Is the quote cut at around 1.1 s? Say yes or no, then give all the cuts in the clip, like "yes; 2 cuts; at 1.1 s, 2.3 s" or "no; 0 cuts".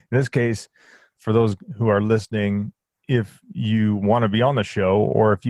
no; 0 cuts